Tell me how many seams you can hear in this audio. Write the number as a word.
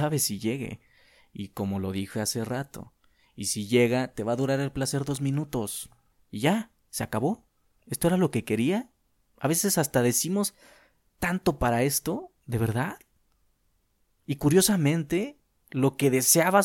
one